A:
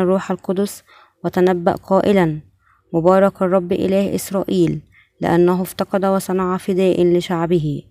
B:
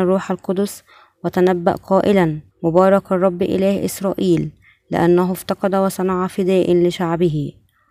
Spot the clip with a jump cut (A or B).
B